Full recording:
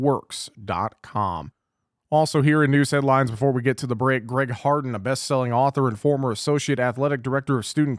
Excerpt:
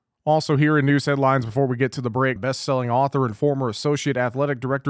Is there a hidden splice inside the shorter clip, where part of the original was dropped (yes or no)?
yes